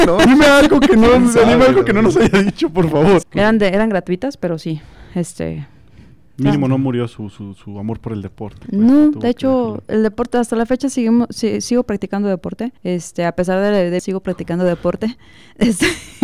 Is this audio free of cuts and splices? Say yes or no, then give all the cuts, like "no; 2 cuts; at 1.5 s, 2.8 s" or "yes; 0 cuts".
no; 3 cuts; at 3.2 s, 12.8 s, 14.0 s